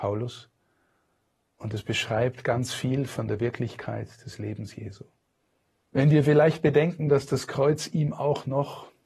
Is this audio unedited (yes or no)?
no